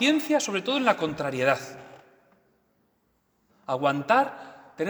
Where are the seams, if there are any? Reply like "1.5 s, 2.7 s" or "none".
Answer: 3.5 s